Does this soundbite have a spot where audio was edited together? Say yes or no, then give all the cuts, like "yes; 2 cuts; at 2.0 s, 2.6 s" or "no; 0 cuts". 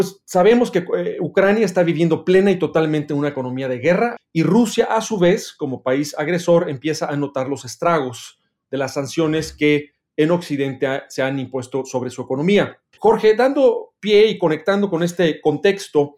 yes; 2 cuts; at 4.2 s, 13.0 s